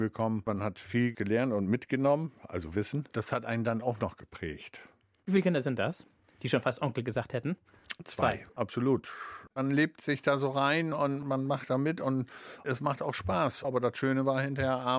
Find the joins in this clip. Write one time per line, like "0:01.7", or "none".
0:08.5
0:13.6